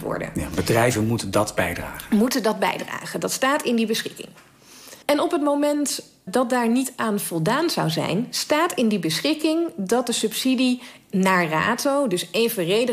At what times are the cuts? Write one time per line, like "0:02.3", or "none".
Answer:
0:05.0
0:06.3